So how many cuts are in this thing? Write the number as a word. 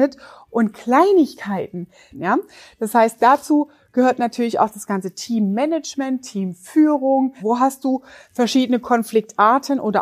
two